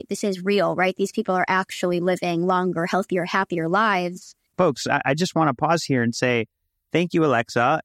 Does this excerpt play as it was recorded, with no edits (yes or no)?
no